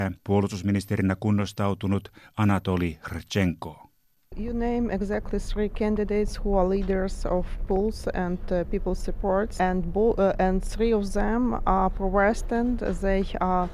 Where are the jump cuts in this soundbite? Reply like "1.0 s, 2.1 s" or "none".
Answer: 9.6 s

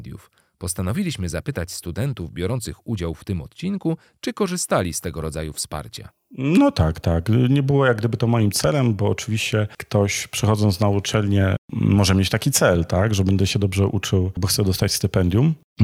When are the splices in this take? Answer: none

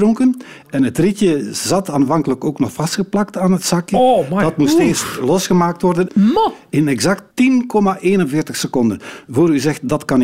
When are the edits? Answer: 6.1 s, 7.3 s

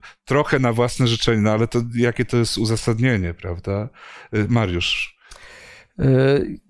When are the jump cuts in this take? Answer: none

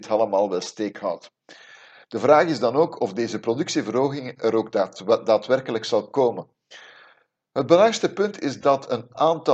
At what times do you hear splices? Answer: none

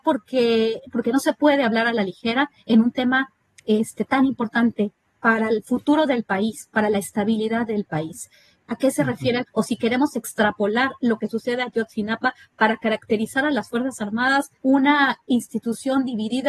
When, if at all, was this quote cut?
9.5 s, 14.6 s

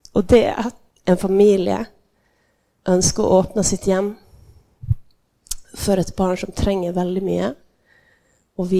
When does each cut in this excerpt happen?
0.9 s

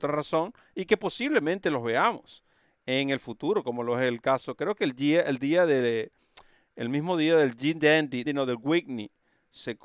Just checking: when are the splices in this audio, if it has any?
8.2 s

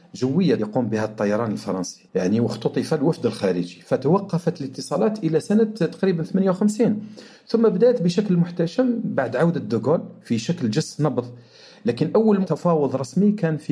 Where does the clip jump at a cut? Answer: 2.1 s

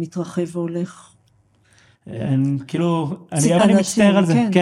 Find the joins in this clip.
2.0 s, 3.6 s

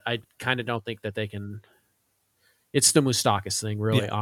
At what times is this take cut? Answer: none

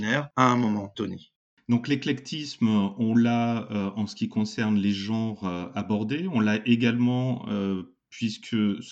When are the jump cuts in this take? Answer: none

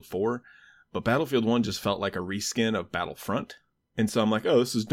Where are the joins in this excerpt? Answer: none

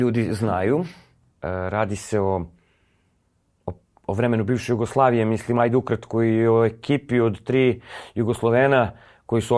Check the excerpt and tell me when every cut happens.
1.3 s

